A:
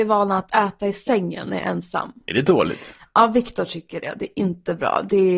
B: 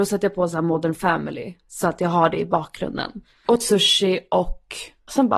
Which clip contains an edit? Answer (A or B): B